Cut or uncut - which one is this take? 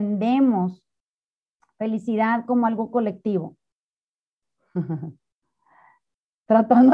cut